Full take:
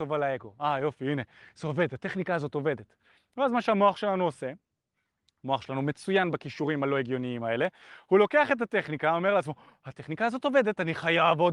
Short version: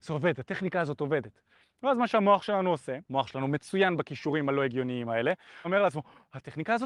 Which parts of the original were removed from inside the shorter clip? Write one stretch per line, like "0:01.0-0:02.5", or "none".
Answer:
0:04.6-0:05.4
0:08.0-0:09.2